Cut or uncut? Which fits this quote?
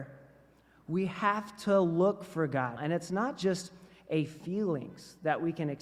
cut